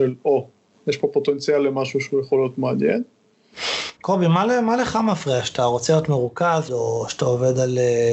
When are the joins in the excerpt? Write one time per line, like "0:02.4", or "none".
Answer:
0:04.0
0:06.7